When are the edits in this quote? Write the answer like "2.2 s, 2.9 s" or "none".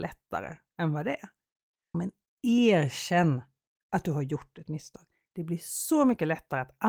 1.9 s, 3.7 s